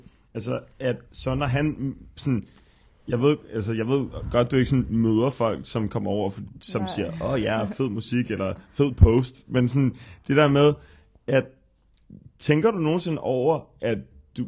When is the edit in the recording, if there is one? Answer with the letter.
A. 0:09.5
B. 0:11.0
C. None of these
C